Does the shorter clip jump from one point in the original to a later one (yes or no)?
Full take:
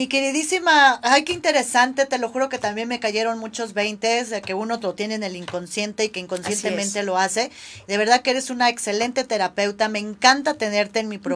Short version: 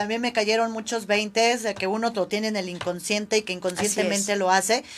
no